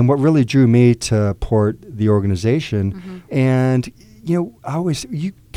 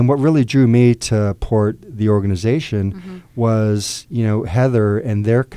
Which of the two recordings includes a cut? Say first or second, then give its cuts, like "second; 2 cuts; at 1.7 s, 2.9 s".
first; 1 cut; at 3.3 s